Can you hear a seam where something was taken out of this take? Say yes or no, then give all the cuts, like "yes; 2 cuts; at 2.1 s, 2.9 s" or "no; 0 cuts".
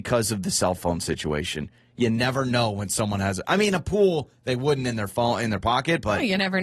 no; 0 cuts